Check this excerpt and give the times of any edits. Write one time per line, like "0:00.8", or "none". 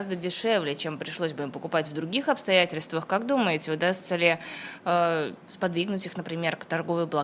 0:05.4